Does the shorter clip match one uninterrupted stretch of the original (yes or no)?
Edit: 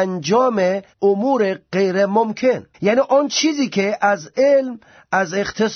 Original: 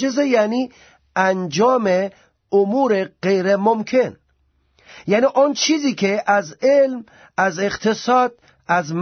no